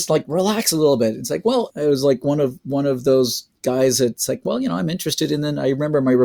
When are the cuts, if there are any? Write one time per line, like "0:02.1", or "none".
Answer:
0:01.7